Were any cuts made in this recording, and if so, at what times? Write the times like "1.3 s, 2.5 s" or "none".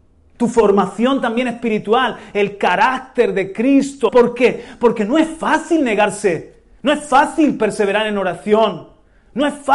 4.1 s